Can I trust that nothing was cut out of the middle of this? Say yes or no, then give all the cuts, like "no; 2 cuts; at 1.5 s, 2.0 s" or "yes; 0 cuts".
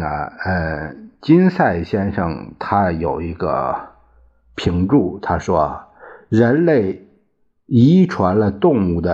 yes; 0 cuts